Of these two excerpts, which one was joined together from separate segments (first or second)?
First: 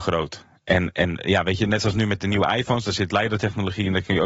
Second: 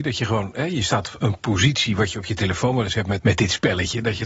second